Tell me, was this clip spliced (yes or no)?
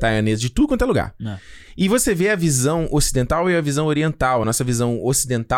no